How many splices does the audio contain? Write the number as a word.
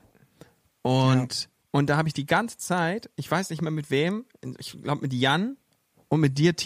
one